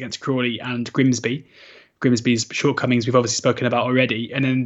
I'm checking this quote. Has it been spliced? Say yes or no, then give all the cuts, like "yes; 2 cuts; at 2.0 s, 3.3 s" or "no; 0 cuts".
no; 0 cuts